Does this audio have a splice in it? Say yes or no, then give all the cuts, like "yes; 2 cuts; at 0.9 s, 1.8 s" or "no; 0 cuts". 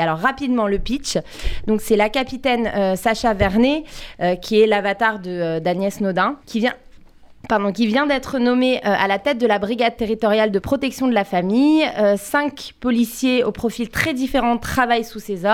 yes; 1 cut; at 6.4 s